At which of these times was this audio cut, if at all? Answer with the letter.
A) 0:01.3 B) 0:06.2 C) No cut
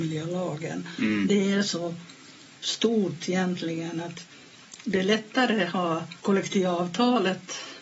B